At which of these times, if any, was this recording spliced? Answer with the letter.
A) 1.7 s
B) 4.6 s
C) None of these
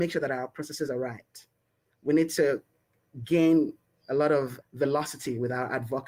B